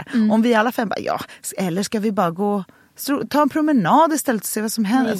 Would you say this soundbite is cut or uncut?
uncut